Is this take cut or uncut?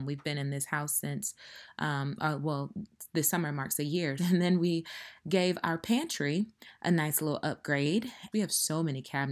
cut